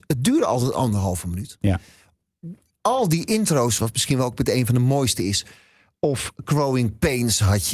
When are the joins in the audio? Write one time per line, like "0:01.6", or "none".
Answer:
0:01.6
0:03.8